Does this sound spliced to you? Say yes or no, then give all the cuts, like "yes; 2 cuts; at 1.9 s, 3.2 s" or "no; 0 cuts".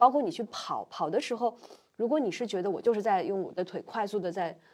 no; 0 cuts